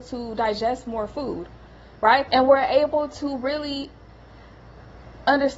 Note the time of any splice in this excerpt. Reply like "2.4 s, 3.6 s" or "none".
2.3 s